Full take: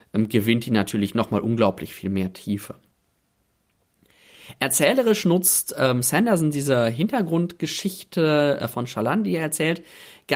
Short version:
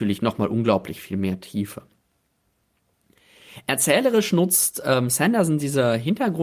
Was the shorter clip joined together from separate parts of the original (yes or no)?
no